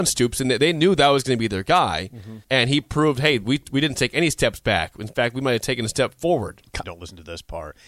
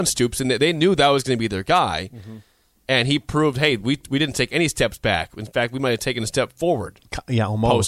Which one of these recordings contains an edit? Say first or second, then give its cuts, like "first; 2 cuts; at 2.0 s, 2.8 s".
first; 2 cuts; at 2.4 s, 6.8 s